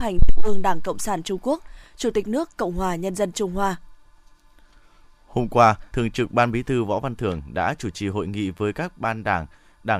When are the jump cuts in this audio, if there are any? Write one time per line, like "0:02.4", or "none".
0:05.9

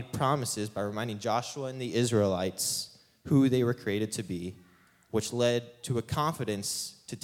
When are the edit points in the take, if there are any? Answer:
none

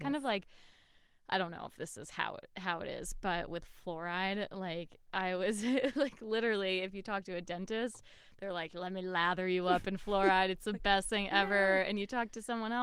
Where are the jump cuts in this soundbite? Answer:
none

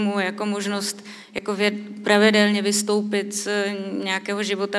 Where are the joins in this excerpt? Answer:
none

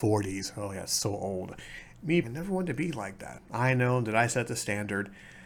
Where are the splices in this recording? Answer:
0:02.2
0:03.4

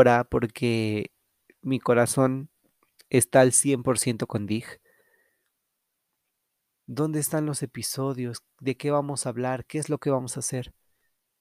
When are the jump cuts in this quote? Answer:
0:06.7

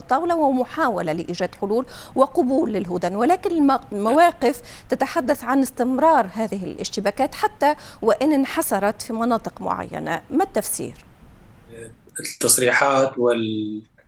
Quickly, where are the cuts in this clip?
none

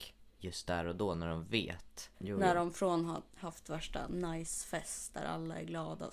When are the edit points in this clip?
0:02.1

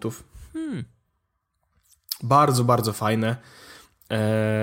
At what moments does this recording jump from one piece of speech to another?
none

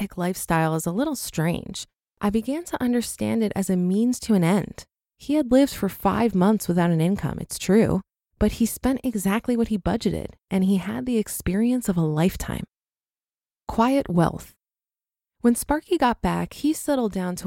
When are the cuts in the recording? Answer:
0:05.0

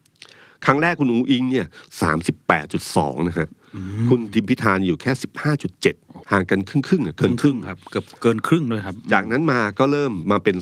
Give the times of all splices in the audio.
0:06.2

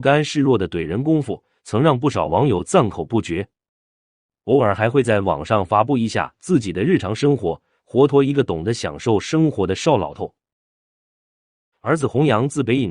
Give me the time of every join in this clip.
0:08.1
0:11.7

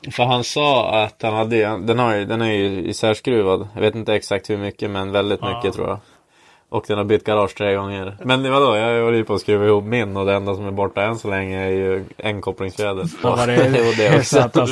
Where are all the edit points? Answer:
0:08.2
0:13.2

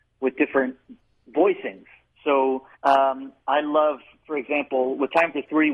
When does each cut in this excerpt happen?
0:02.7

